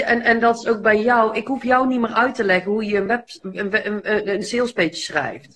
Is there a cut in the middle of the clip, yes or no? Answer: no